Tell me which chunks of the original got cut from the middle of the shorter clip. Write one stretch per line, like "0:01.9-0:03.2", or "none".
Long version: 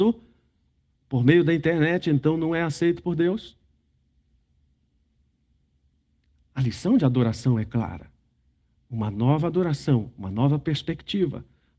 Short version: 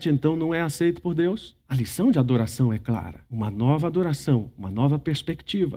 0:03.6-0:06.5
0:08.1-0:08.9